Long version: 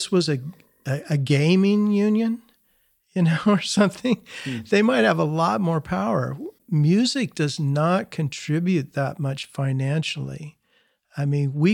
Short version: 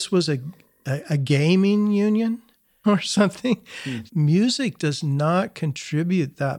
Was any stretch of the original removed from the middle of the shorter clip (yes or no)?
yes